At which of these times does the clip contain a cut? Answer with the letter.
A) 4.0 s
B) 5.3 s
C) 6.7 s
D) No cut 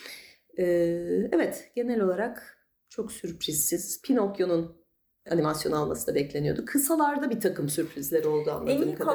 B